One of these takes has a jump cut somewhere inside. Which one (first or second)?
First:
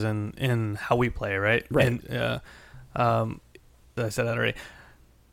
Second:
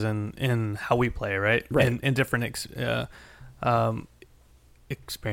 first